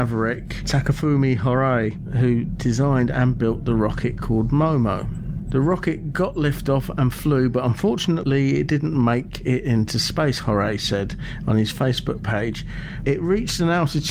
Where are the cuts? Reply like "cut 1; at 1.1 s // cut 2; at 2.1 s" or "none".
cut 1; at 13.0 s